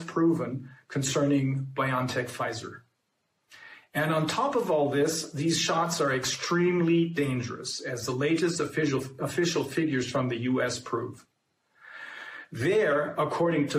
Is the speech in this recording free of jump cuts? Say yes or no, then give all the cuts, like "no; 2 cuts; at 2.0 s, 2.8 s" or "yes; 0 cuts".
yes; 0 cuts